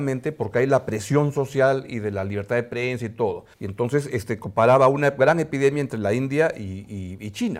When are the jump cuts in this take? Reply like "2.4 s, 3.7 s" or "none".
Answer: 3.5 s